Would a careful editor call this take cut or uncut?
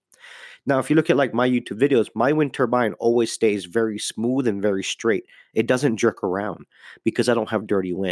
uncut